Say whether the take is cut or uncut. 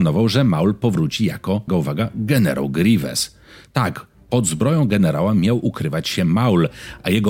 cut